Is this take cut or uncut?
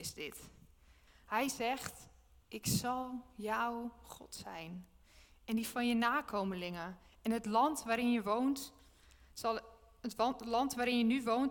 cut